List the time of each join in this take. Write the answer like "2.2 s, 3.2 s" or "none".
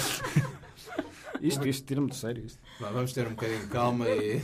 1.6 s